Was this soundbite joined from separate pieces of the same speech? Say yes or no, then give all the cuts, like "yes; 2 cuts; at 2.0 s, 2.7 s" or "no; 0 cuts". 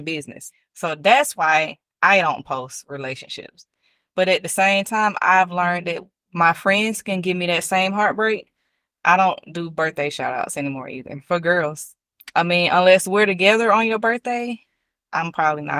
no; 0 cuts